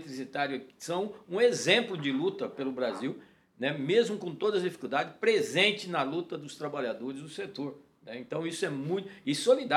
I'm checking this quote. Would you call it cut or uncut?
uncut